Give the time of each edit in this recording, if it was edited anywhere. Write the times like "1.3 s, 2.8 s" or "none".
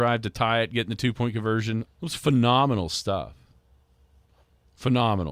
1.9 s